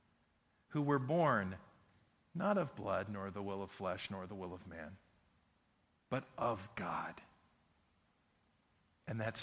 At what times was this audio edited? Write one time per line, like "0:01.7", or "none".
none